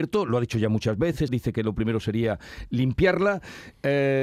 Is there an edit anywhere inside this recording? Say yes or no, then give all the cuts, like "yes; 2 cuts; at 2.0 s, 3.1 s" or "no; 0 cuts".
yes; 1 cut; at 1.3 s